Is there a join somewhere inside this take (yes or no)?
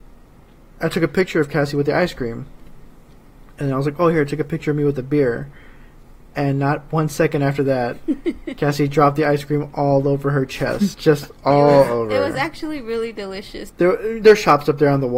yes